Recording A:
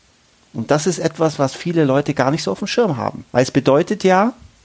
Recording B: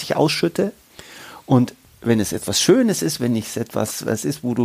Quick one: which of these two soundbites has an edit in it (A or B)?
A